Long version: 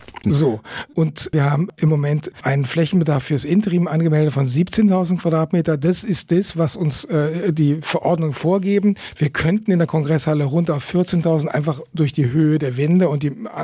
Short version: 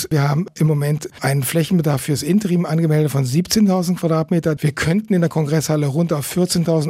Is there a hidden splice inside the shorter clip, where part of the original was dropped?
yes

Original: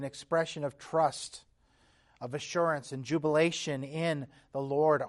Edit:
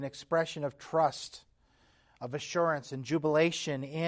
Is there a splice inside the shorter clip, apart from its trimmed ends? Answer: no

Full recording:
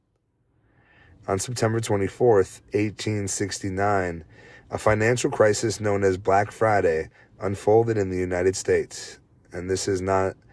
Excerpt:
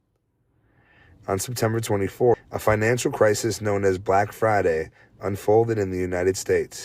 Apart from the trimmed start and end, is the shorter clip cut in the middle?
yes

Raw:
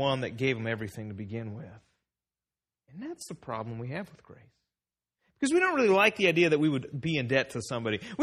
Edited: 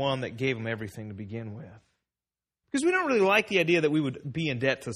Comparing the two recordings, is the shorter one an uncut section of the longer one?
no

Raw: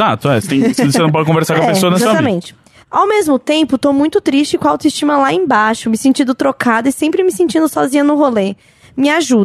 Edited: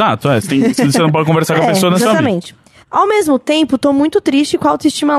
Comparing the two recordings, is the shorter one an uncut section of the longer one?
yes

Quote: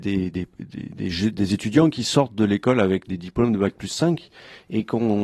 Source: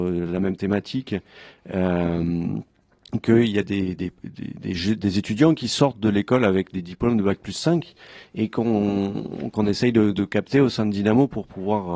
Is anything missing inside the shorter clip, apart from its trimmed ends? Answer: no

